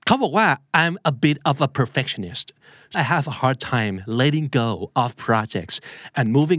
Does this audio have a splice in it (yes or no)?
yes